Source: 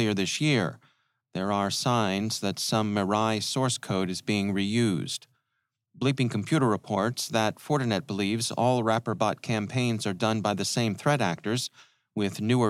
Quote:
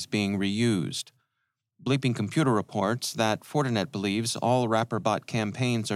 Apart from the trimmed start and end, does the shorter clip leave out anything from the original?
no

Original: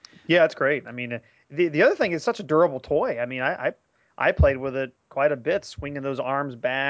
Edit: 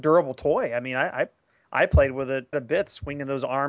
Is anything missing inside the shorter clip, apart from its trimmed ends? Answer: yes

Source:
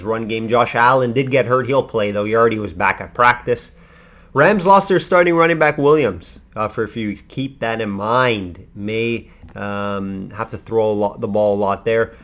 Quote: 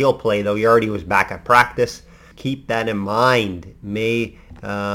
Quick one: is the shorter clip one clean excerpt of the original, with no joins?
no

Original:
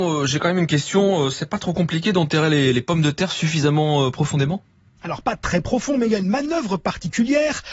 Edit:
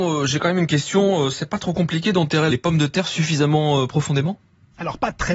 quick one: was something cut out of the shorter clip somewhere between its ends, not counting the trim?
yes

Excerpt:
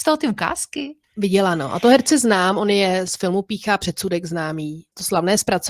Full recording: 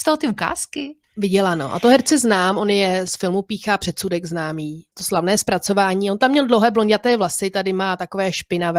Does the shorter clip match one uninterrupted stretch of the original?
yes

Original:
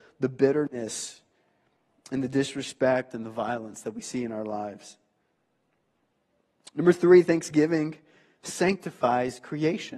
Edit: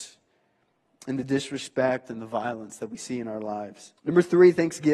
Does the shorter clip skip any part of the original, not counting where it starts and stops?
yes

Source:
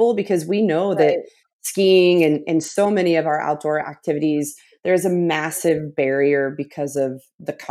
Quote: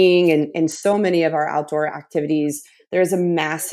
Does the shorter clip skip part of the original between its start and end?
no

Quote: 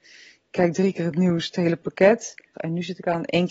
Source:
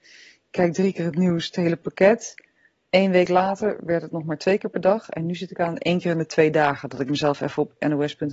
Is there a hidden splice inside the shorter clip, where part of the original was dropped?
yes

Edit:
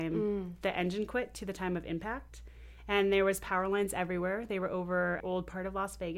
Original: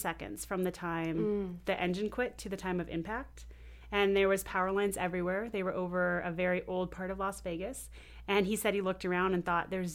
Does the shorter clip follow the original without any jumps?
no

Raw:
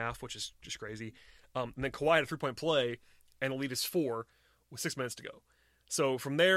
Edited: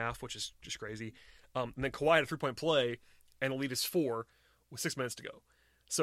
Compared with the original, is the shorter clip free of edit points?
yes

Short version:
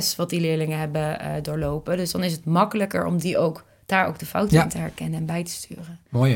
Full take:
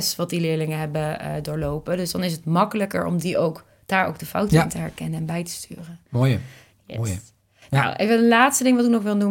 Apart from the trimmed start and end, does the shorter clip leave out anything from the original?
no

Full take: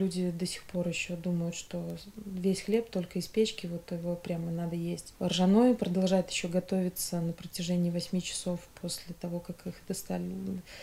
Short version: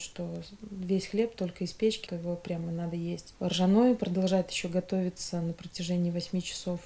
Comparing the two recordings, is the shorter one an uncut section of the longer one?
no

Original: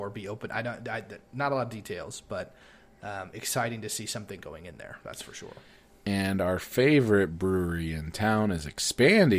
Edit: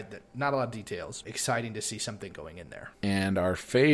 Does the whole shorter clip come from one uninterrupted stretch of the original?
no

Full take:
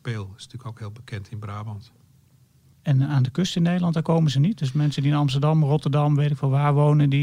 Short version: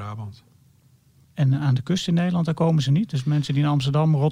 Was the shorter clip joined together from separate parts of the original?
no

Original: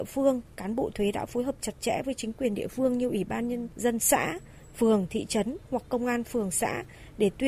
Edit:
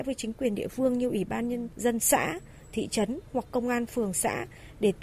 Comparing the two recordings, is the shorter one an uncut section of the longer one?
no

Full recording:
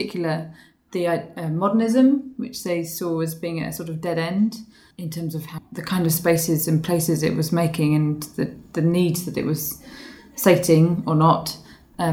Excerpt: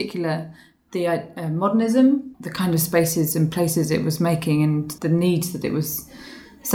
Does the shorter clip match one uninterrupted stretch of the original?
no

